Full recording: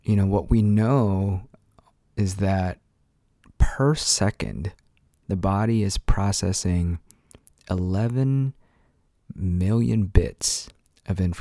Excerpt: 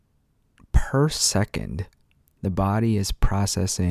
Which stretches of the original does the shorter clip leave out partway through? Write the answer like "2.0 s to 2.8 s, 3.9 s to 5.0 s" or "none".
none